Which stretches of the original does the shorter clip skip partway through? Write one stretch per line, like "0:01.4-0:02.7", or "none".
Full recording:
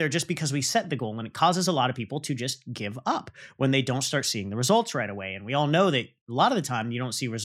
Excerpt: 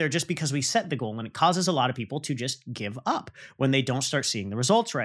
none